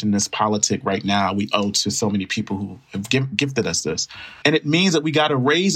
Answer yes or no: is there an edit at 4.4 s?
yes